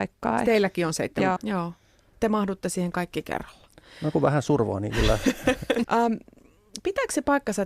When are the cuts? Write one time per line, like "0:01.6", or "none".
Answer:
0:01.4
0:05.8